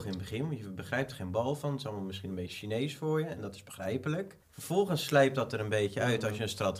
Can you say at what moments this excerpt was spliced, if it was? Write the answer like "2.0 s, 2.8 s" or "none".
4.4 s